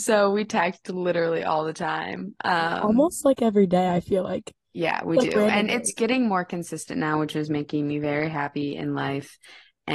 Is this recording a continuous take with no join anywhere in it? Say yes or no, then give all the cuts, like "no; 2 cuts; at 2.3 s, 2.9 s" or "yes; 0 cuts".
yes; 0 cuts